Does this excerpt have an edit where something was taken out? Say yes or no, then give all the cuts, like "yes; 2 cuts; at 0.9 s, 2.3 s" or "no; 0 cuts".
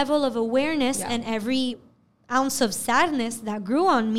no; 0 cuts